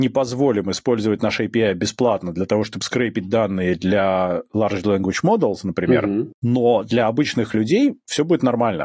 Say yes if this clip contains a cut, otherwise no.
no